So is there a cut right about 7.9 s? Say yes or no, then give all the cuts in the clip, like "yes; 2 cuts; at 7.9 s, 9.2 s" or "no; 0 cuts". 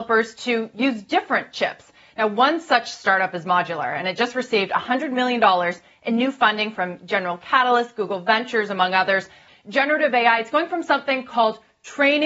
no; 1 cut; at 9.5 s